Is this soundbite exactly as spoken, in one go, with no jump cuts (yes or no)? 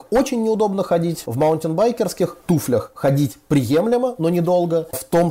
yes